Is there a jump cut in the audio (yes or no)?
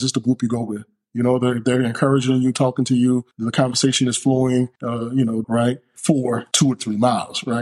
yes